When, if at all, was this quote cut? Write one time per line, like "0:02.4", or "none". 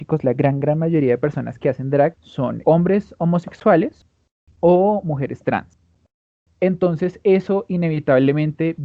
0:02.6